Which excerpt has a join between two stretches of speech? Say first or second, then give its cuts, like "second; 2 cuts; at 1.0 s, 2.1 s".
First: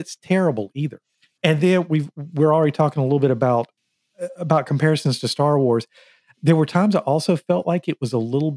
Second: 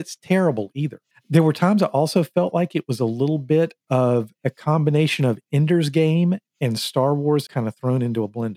second; 2 cuts; at 1.1 s, 7.5 s